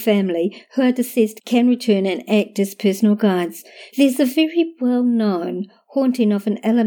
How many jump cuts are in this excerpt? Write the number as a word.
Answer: one